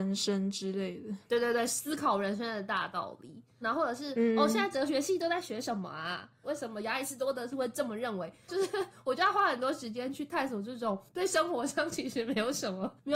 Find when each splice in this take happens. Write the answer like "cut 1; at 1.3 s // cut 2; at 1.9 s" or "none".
cut 1; at 3.6 s // cut 2; at 6.4 s